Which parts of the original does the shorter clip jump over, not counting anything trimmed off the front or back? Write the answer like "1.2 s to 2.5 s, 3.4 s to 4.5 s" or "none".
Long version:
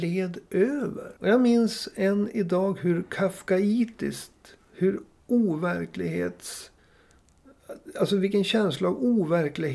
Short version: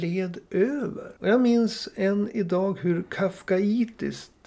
none